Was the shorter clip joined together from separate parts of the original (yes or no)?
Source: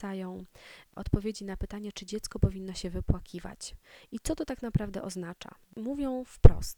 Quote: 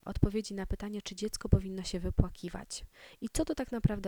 no